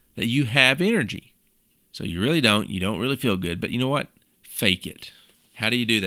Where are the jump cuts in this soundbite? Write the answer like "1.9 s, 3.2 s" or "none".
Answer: none